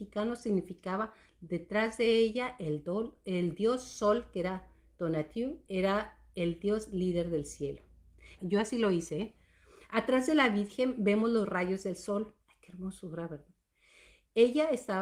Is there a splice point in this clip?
yes; 2 cuts; at 8.4 s, 12.4 s

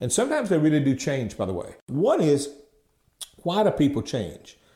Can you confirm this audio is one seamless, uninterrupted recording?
no; 1 cut; at 1.8 s

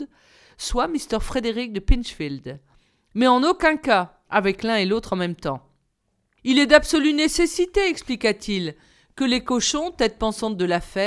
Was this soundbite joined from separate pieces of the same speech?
yes; 2 cuts; at 4.3 s, 6.4 s

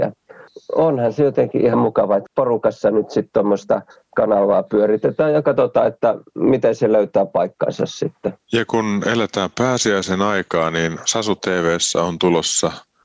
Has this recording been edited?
no; 0 cuts

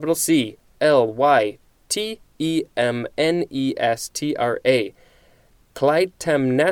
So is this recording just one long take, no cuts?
yes; 0 cuts

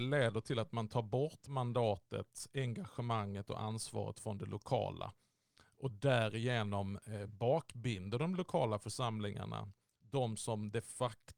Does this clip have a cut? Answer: no; 0 cuts

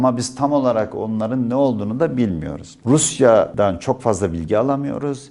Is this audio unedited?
yes; 0 cuts

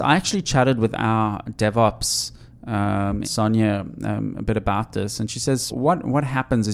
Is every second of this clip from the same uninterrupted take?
no; 2 cuts; at 3.2 s, 5.7 s

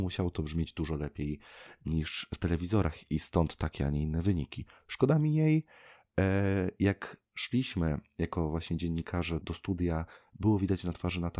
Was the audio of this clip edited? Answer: yes; 1 cut; at 9.4 s

